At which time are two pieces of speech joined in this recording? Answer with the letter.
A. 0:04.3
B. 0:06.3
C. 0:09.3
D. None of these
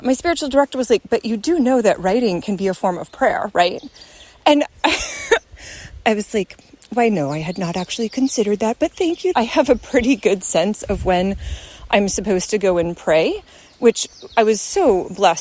C